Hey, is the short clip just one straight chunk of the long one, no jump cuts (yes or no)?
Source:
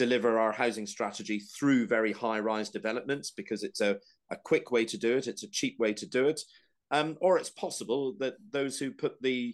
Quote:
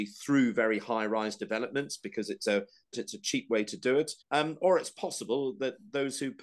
no